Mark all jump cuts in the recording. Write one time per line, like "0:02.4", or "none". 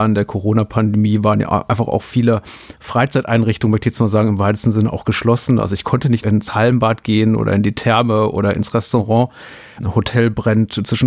0:06.2
0:09.8